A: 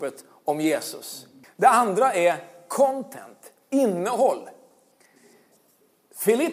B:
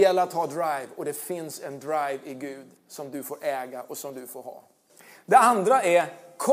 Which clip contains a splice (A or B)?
A